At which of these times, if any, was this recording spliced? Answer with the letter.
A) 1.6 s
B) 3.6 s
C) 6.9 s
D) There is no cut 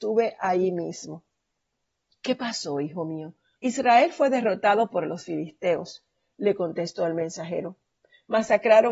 B